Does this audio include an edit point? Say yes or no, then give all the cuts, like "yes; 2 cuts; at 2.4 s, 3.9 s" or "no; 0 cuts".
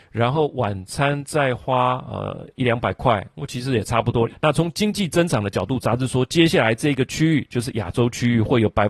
yes; 1 cut; at 4.3 s